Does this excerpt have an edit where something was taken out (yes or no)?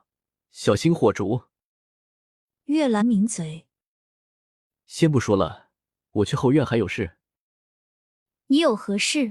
yes